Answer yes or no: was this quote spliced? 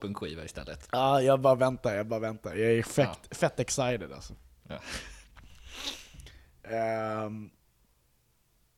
no